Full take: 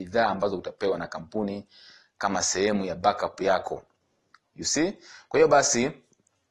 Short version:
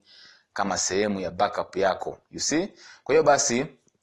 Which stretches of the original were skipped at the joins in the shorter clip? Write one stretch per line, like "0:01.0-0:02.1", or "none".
0:03.9-0:04.5